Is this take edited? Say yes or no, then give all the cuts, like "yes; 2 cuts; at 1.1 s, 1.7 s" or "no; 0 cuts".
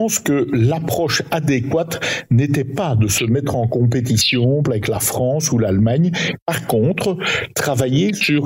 yes; 1 cut; at 4.6 s